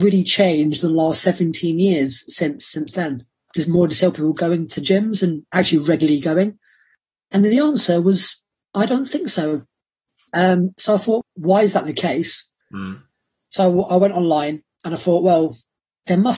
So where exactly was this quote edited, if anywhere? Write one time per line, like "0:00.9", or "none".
0:11.2